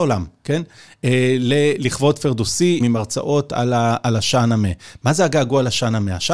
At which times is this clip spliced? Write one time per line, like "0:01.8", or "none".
0:02.8